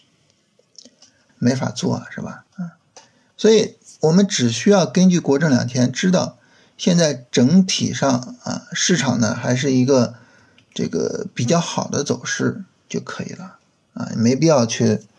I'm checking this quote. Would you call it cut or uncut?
cut